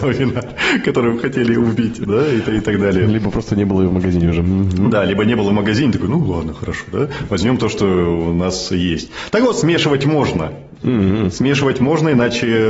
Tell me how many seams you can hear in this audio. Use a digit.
0